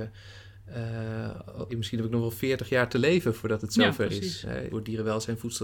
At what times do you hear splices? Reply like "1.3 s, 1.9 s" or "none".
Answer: 1.7 s, 4.7 s